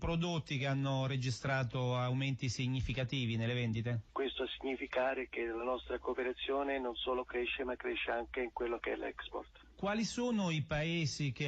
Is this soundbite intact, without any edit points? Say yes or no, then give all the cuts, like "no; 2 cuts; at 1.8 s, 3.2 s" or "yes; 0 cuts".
no; 1 cut; at 4.1 s